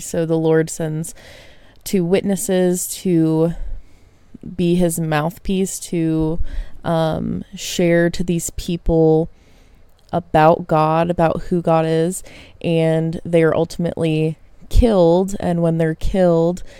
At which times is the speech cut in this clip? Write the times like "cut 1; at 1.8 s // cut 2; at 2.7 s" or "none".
none